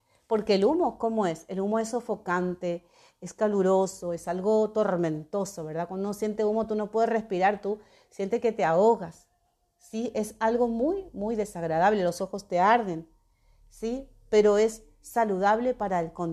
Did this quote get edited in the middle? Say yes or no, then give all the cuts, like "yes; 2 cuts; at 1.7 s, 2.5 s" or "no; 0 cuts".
no; 0 cuts